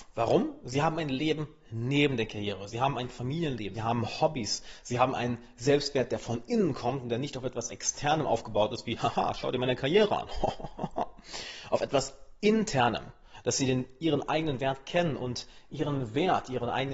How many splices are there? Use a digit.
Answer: 1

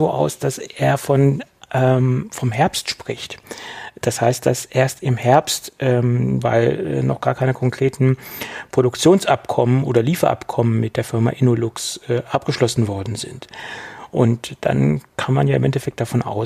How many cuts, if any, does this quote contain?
1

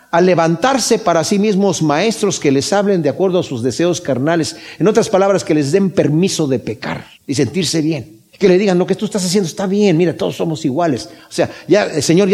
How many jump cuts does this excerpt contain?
2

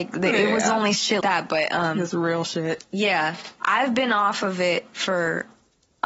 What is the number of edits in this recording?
2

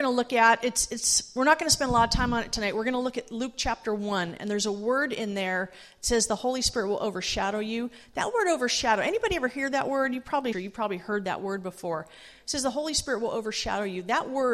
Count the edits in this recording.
1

